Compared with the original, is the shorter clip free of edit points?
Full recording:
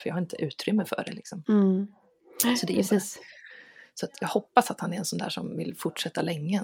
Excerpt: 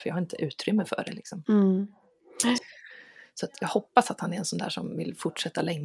no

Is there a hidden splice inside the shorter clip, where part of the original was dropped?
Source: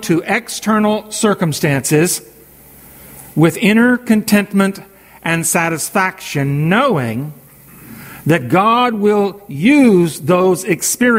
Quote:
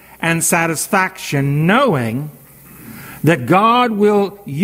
no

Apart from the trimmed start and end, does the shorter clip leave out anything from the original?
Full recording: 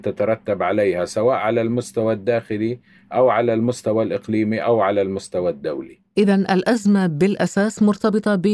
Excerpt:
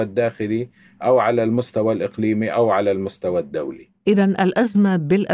no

